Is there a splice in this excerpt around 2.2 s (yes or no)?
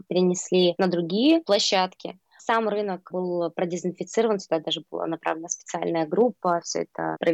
no